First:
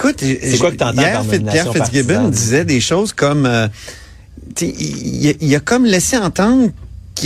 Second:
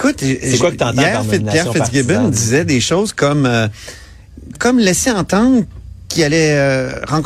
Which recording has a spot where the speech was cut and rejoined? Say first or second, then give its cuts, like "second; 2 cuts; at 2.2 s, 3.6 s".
second; 1 cut; at 4.5 s